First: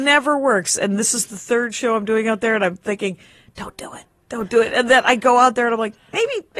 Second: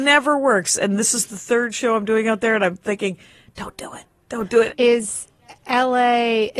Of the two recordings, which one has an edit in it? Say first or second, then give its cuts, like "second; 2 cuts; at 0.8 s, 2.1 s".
second; 1 cut; at 4.7 s